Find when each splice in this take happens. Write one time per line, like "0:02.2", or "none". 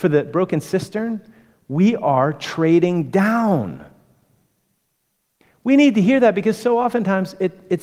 none